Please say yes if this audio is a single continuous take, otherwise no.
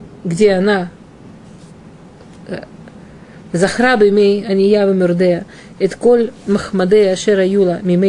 yes